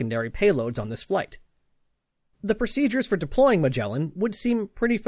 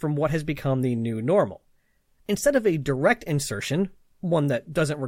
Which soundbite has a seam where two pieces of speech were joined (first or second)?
first